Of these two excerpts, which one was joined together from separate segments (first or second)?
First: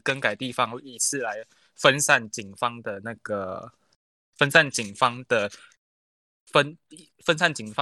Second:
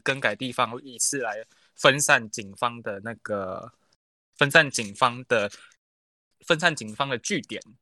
second